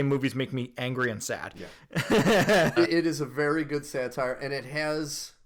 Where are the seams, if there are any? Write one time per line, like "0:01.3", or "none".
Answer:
0:02.8